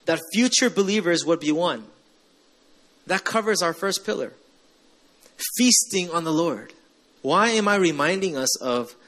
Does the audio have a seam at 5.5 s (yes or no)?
no